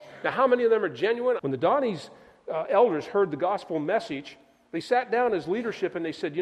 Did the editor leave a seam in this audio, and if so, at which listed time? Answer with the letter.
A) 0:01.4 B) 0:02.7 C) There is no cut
A